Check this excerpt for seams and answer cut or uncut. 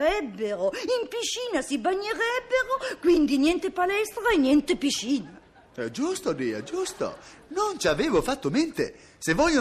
uncut